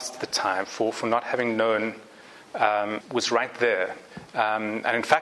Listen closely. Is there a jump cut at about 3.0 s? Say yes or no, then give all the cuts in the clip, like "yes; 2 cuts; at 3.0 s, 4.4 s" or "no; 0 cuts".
yes; 1 cut; at 3.0 s